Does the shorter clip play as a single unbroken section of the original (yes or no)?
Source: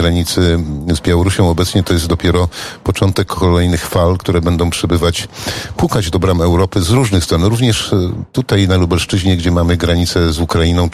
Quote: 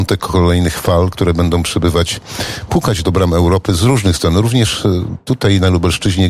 yes